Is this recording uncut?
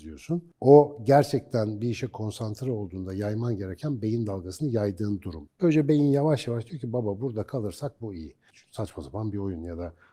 no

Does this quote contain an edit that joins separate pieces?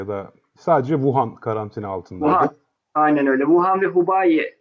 no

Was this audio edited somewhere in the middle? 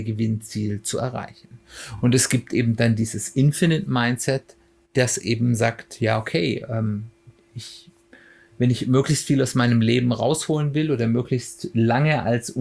no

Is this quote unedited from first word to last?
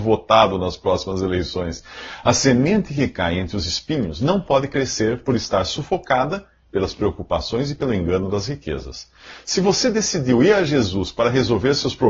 yes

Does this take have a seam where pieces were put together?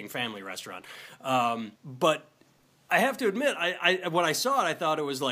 yes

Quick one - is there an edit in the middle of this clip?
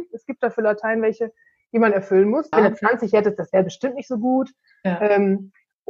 yes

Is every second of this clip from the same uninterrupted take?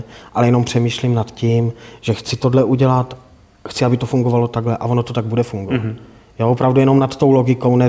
yes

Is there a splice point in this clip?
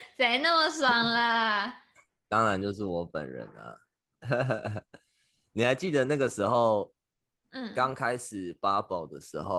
no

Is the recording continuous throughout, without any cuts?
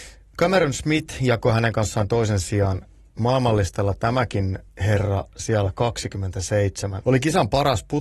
no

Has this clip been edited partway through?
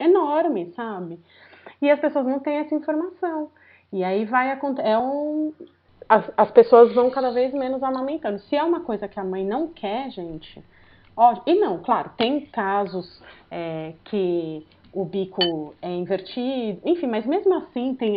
no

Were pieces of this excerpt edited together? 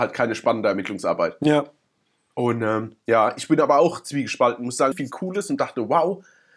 yes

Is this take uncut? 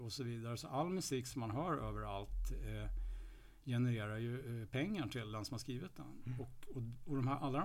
yes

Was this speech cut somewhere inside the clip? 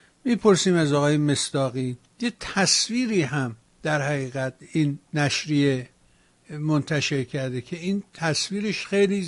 yes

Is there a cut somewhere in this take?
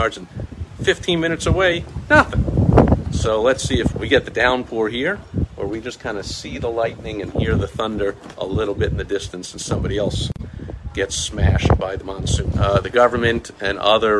yes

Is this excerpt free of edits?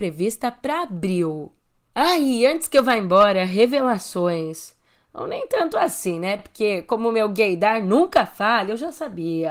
yes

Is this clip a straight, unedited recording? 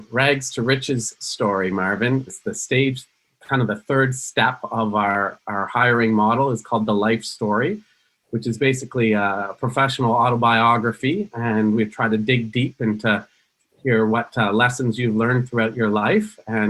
no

